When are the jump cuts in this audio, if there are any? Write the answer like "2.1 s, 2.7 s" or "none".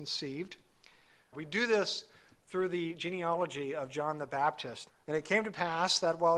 1.3 s, 4.9 s